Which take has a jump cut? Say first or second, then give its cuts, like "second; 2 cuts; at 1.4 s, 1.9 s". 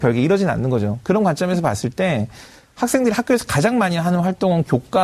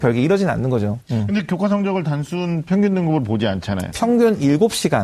second; 2 cuts; at 1.0 s, 3.9 s